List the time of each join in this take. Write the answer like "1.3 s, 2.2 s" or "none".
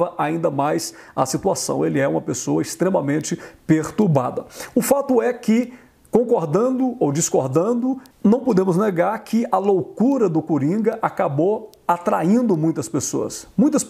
8.1 s